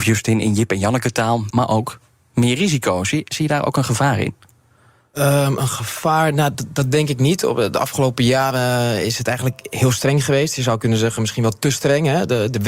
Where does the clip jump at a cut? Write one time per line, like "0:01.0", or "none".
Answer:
0:01.5